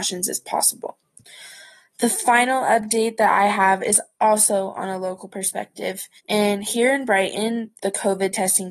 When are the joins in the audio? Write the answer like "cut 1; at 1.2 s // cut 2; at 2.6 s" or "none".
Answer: cut 1; at 6.2 s // cut 2; at 7.8 s